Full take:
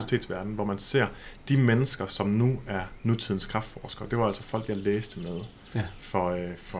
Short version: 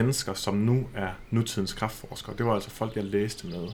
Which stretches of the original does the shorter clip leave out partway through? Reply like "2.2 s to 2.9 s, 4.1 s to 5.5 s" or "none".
none